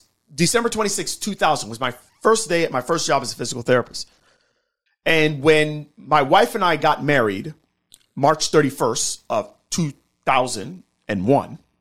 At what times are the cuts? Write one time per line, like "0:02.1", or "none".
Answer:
0:04.9